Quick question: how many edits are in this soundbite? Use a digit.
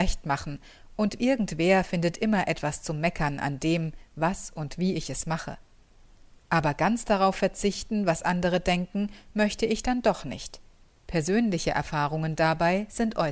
1